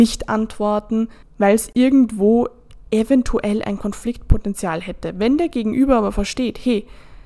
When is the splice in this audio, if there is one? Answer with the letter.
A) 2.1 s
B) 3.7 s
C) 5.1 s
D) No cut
D